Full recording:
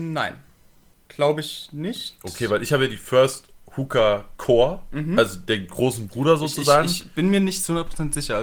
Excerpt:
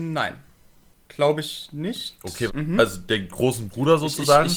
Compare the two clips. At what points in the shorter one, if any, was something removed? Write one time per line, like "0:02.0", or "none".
0:02.5